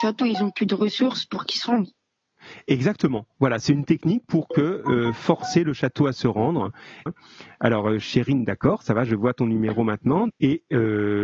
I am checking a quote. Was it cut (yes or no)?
yes